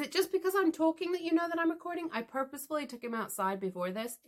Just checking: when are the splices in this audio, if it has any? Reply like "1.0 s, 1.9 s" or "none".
none